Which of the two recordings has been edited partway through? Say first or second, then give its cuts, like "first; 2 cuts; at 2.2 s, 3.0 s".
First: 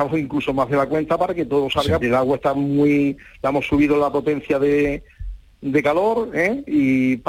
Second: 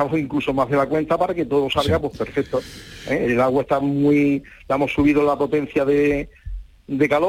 first; 1 cut; at 2.0 s